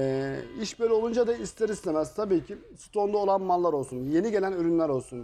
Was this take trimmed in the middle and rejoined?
no; 0 cuts

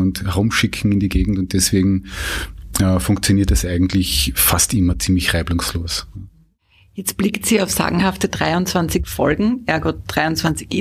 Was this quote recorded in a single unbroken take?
yes; 0 cuts

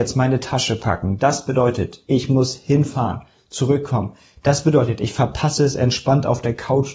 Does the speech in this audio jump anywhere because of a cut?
no; 0 cuts

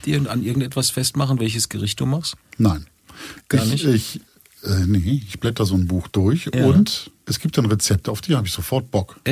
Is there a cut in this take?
yes; 1 cut; at 7.2 s

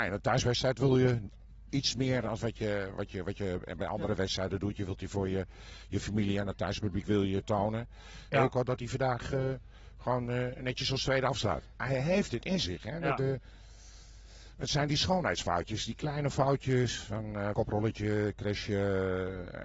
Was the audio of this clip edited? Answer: yes; 3 cuts; at 8.3 s, 11.7 s, 17.5 s

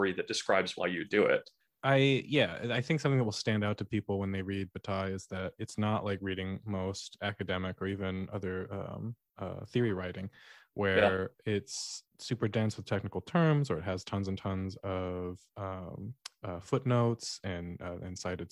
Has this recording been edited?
no; 0 cuts

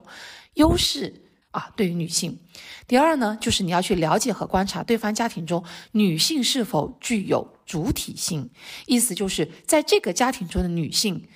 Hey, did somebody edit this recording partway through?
yes; 1 cut; at 1.5 s

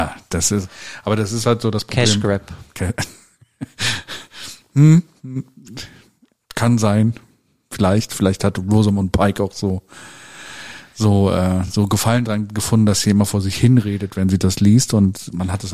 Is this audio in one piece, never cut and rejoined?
yes; 0 cuts

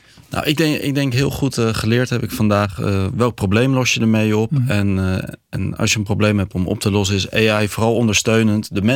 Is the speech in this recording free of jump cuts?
yes; 0 cuts

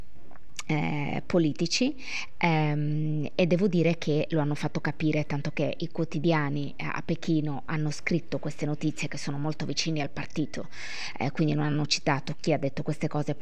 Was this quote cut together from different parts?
no; 0 cuts

